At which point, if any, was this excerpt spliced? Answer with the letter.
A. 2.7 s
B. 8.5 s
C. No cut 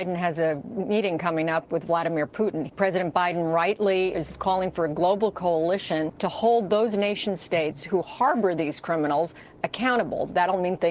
A